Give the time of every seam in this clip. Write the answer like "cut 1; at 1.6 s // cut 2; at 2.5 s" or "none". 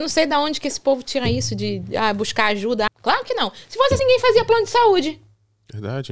cut 1; at 2.9 s // cut 2; at 4.0 s